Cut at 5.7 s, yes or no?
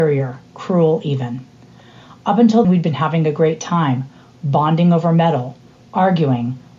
no